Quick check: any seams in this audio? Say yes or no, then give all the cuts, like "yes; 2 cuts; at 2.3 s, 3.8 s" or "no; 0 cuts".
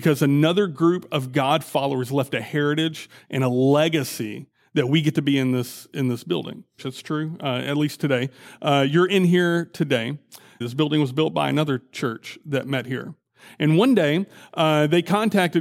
yes; 2 cuts; at 6.8 s, 10.6 s